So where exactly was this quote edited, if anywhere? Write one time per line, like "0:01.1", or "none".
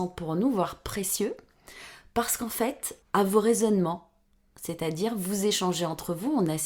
0:03.0